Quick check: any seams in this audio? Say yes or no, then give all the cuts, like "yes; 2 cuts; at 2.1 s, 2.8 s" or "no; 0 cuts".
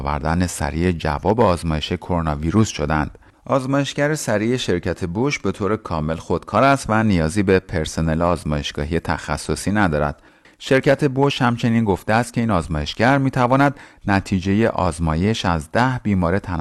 yes; 2 cuts; at 3.3 s, 10.4 s